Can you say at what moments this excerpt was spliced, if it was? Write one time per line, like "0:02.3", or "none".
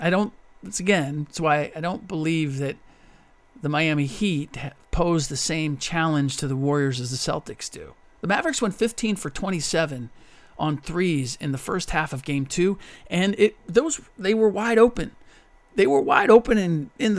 0:08.0